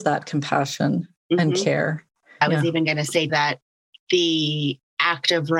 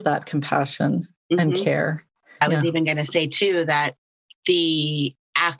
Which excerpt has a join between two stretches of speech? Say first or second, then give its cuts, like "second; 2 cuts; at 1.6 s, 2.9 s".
first; 1 cut; at 3.3 s